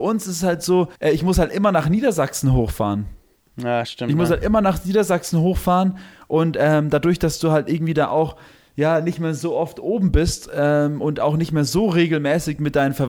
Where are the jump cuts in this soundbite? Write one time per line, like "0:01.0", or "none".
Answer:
0:01.0